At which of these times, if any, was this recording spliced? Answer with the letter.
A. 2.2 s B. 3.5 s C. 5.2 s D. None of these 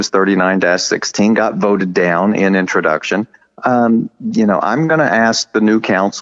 D